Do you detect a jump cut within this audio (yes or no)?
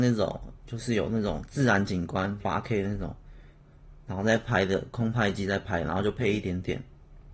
yes